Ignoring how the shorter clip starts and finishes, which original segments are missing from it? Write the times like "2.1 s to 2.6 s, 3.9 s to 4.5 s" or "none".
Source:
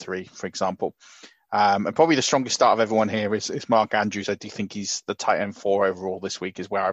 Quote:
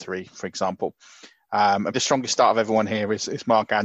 1.9 s to 2.2 s